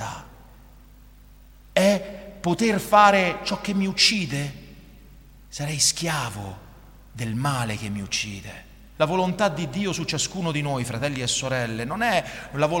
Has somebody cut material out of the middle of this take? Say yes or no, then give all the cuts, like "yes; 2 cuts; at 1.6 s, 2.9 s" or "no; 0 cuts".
yes; 1 cut; at 8.9 s